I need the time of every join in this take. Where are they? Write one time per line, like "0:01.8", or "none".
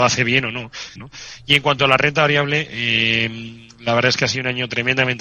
0:01.0